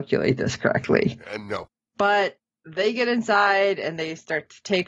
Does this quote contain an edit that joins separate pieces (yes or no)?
no